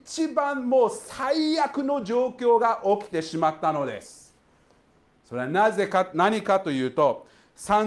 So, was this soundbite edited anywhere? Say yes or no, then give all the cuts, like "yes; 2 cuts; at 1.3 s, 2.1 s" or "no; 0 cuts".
no; 0 cuts